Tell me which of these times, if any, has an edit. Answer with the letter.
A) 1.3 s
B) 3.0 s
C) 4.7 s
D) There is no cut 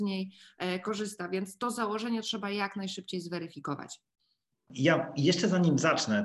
C